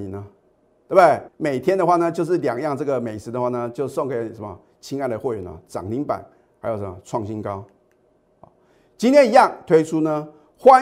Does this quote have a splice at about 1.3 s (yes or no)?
yes